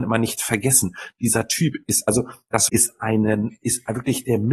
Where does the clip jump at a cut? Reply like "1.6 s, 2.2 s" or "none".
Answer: 2.7 s